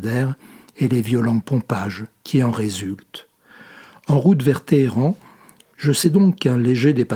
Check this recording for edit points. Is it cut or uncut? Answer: uncut